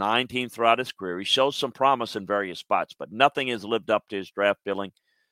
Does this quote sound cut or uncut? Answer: uncut